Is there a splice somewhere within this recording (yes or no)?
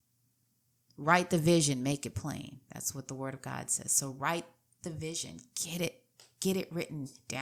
no